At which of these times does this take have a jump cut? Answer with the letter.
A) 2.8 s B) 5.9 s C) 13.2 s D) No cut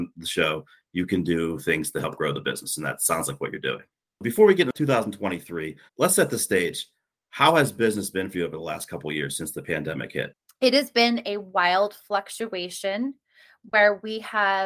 B